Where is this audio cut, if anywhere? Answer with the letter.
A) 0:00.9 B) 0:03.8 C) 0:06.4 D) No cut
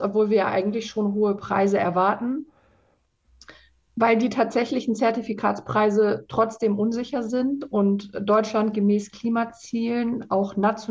D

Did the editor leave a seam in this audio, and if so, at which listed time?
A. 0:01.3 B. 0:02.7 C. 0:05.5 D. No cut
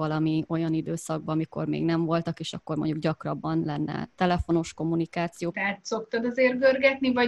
C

